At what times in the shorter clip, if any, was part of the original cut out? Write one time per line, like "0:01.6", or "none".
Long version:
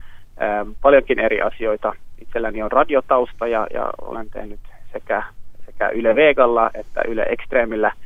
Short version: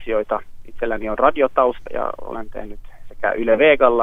0:01.9
0:03.1